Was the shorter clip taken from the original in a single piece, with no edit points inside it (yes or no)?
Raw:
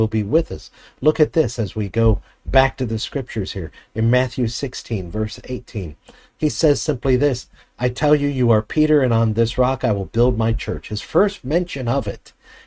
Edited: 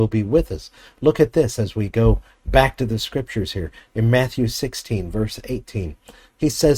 yes